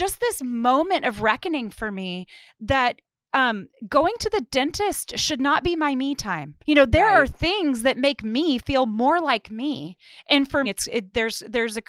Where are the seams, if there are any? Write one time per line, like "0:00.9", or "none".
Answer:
0:06.6
0:10.6